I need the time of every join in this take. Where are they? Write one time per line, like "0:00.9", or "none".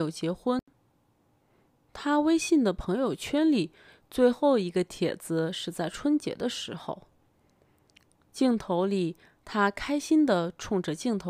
none